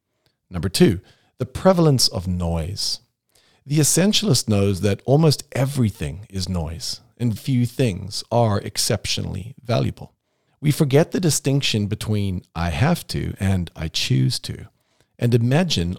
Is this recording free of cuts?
no; 2 cuts; at 7.4 s, 10.5 s

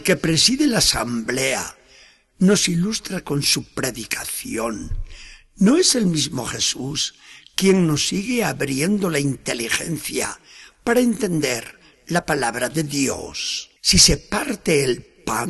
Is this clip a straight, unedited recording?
no; 1 cut; at 13.8 s

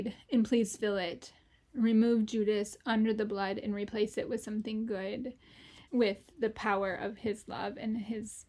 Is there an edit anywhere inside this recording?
yes; 1 cut; at 5.9 s

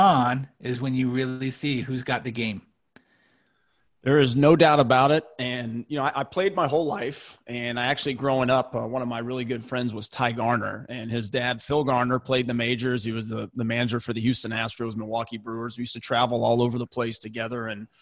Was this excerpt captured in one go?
yes; 0 cuts

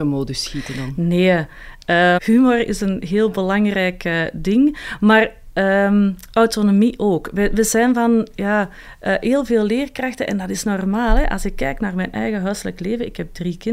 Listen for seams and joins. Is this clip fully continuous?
no; 1 cut; at 2.2 s

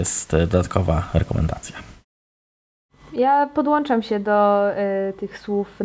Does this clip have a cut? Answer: no; 0 cuts

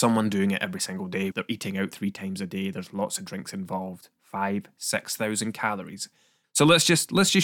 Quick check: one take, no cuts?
no; 3 cuts; at 1.3 s, 4.2 s, 6.4 s

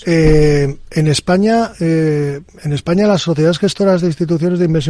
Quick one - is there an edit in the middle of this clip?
yes; 1 cut; at 2.5 s

